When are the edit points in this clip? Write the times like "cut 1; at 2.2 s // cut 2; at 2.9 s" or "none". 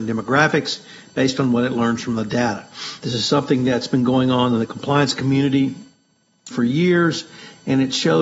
cut 1; at 3.0 s // cut 2; at 6.5 s